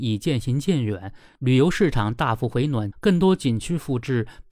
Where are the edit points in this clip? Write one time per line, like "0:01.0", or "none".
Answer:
0:02.9